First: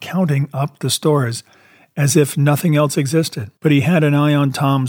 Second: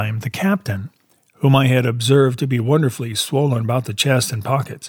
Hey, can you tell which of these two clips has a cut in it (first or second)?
first